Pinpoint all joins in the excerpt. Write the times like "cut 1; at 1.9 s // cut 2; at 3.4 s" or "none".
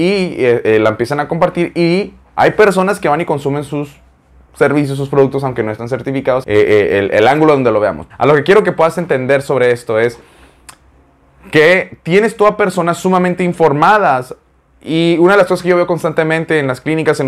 cut 1; at 6.4 s // cut 2; at 8.1 s